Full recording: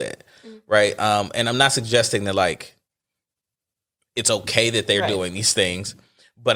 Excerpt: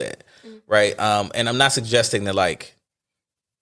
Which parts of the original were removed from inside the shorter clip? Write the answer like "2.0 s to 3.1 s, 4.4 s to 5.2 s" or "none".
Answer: none